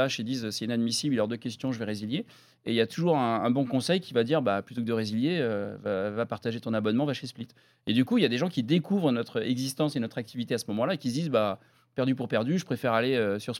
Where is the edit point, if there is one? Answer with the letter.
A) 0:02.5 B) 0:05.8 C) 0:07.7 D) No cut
D